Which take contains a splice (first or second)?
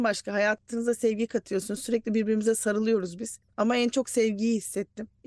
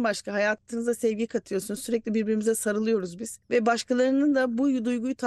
first